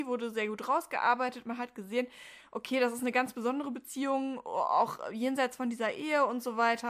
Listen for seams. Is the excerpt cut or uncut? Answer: uncut